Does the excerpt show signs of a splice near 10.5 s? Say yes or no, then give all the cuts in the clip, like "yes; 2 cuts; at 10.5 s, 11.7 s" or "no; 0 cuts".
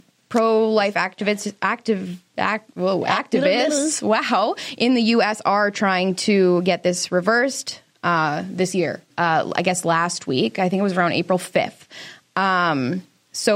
no; 1 cut; at 9.1 s